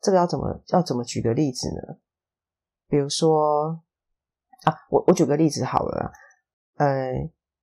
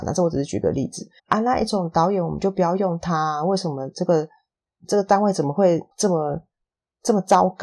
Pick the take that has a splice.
second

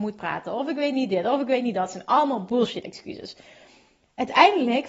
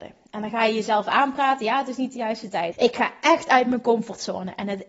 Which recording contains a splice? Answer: second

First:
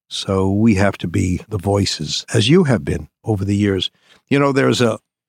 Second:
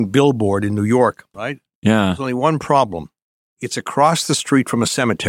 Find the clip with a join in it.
second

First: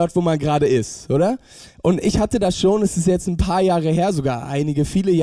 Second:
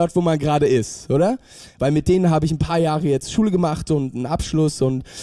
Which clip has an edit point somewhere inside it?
second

